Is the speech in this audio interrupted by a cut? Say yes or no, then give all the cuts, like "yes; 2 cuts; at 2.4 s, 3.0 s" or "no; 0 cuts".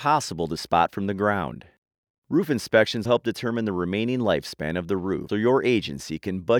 yes; 2 cuts; at 3.0 s, 5.3 s